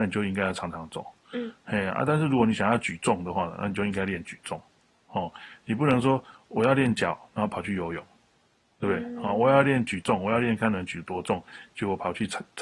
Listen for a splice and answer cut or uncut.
uncut